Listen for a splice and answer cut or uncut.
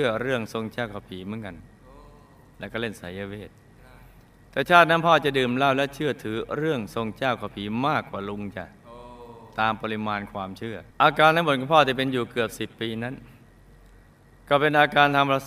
cut